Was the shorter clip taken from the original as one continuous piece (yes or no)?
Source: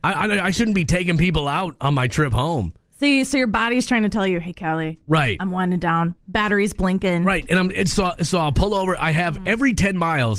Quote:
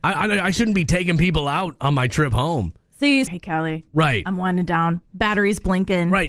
no